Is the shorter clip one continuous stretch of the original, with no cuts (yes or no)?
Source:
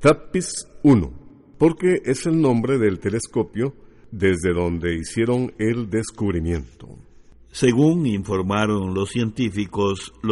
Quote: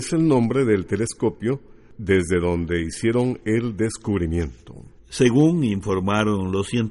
no